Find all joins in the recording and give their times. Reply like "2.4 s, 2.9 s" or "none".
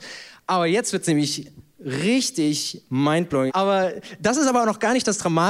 3.5 s